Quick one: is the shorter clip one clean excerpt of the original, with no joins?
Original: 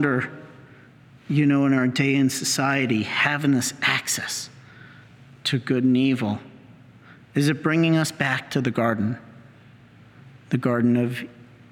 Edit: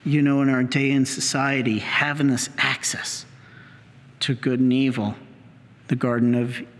no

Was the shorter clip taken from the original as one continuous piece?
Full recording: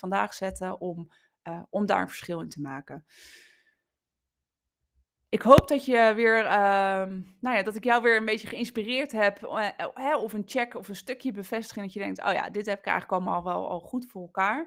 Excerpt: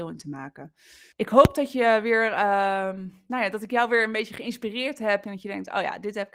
no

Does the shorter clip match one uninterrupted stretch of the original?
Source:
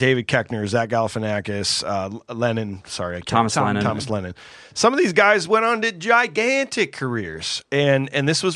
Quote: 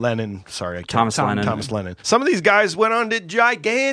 no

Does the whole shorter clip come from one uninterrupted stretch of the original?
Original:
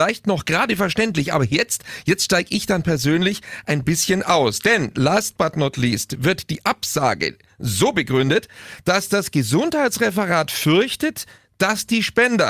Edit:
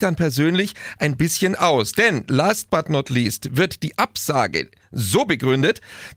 yes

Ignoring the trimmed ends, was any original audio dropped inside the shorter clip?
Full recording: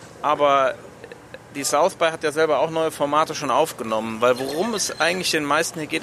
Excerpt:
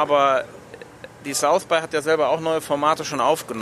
no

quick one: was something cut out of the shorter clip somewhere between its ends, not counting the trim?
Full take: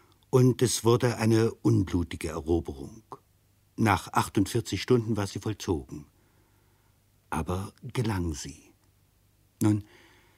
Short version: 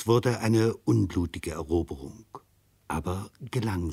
yes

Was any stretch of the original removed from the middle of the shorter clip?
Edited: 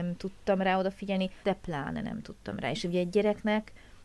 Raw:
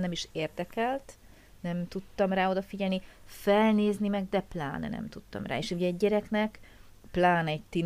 yes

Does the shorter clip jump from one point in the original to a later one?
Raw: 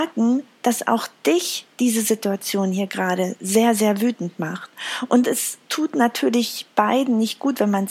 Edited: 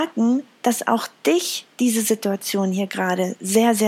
no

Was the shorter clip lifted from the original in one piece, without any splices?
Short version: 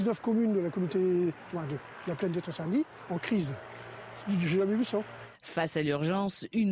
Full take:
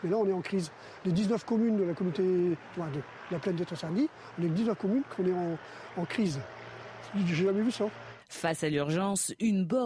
no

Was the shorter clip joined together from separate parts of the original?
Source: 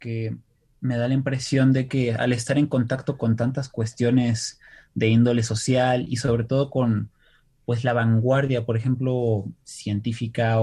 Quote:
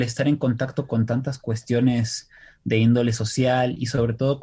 no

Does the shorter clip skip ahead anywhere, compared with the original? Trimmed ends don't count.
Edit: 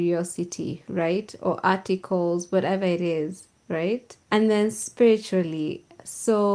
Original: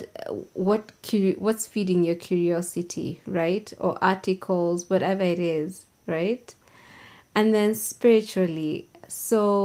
yes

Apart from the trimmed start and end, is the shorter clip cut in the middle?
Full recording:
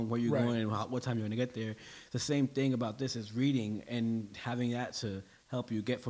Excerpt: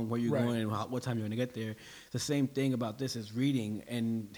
no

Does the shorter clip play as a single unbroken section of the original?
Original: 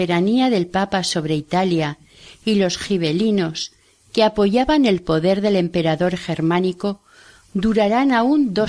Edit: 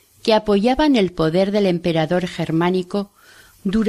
yes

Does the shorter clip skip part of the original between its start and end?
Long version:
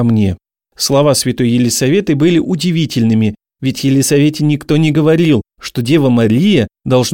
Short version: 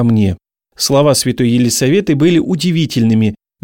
no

